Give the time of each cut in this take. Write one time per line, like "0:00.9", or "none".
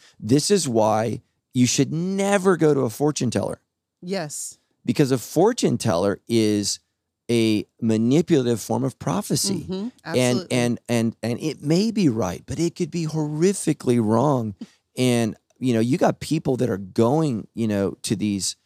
none